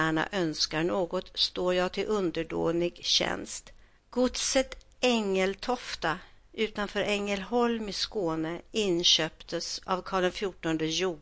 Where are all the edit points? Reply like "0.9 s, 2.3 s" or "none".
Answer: 4.0 s